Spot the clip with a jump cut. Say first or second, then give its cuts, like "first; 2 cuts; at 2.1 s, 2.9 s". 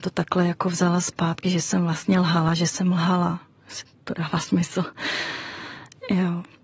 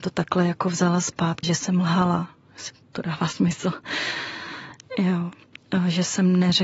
second; 1 cut; at 1.4 s